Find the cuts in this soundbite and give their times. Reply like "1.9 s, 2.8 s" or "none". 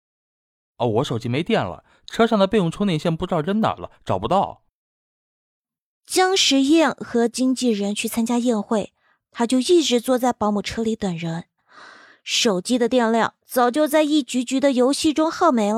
none